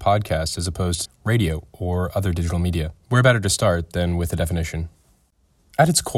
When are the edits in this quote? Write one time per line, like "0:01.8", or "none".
0:01.0
0:03.0